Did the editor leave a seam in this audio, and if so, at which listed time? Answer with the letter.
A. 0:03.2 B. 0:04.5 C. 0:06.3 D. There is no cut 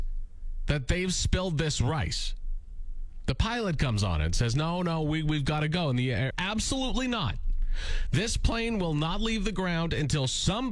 C